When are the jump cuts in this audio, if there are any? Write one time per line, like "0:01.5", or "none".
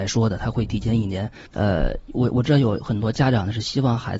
0:01.5